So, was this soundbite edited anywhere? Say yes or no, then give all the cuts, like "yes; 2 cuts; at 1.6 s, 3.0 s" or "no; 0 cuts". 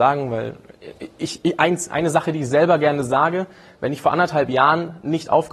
no; 0 cuts